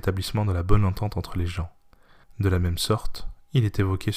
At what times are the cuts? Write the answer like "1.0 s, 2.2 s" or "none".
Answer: 2.2 s